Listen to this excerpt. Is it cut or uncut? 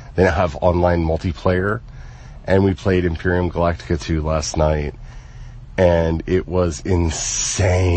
uncut